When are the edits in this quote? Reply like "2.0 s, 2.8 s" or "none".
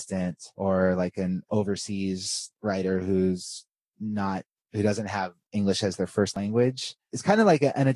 none